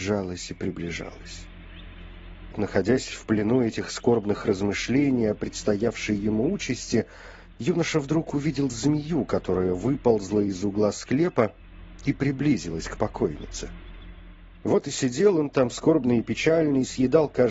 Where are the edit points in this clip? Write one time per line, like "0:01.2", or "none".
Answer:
0:02.5
0:14.6